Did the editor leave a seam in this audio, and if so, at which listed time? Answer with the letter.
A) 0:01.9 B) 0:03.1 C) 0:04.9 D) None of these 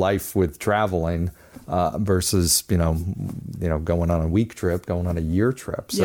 D